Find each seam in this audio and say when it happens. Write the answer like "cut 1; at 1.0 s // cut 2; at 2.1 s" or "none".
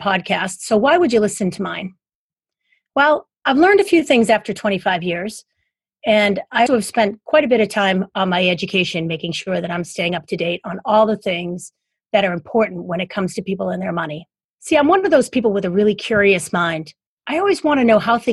cut 1; at 6.7 s // cut 2; at 14.5 s